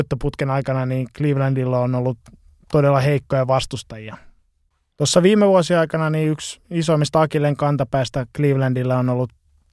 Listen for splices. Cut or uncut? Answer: cut